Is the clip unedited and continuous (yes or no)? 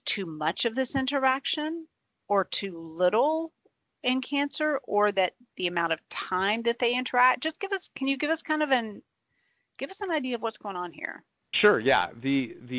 yes